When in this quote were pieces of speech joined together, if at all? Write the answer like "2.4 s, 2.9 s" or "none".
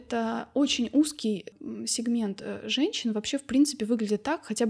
none